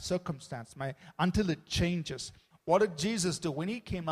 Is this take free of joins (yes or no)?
no